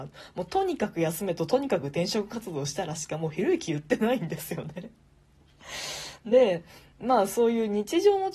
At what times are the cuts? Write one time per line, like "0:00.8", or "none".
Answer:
none